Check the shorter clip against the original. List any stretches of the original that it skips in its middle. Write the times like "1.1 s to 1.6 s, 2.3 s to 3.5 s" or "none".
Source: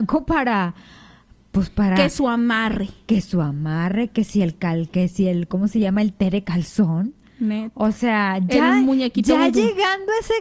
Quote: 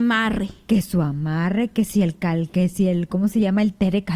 none